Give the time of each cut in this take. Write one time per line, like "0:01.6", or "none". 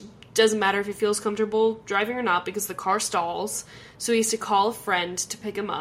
none